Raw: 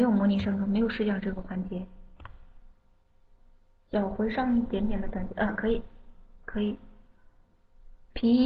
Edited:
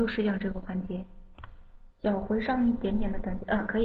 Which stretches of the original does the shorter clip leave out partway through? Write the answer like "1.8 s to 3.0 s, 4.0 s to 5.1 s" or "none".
2.7 s to 3.8 s